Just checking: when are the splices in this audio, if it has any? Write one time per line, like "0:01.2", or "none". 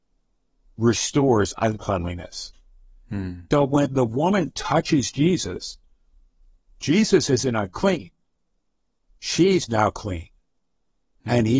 none